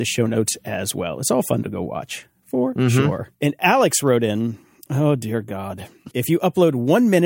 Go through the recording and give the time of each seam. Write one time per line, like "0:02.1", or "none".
0:03.3
0:06.1